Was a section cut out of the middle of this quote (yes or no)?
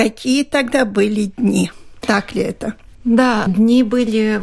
no